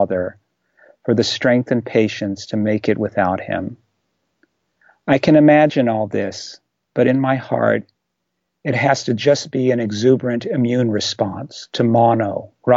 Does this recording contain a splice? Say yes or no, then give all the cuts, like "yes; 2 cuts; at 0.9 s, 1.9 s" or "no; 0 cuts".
no; 0 cuts